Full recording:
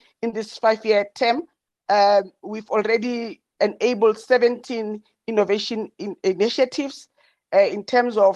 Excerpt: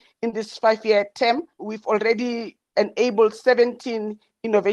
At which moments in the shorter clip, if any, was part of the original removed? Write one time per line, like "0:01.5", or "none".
0:01.6